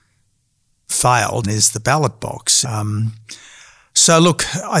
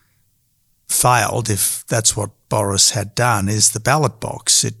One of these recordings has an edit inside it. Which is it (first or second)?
first